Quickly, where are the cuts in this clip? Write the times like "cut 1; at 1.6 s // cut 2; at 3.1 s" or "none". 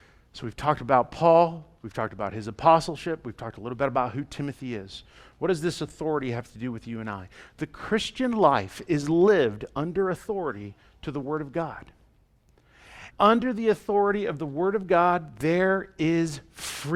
cut 1; at 13.1 s